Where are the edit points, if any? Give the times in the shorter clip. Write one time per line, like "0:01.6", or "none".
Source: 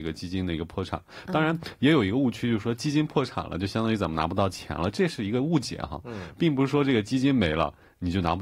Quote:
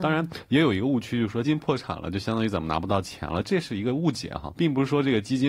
0:01.4
0:04.5